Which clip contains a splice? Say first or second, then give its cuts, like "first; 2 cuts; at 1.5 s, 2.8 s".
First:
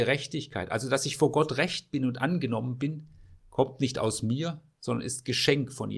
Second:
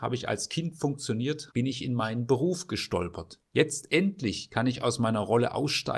second; 2 cuts; at 1.5 s, 3.5 s